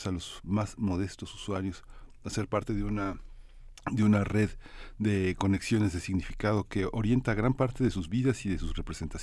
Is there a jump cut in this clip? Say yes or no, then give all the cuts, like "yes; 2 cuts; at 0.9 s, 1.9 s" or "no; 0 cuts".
no; 0 cuts